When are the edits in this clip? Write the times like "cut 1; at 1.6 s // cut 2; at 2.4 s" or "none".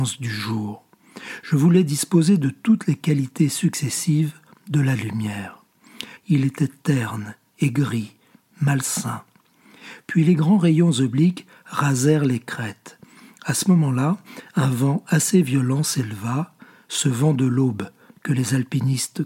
cut 1; at 6.2 s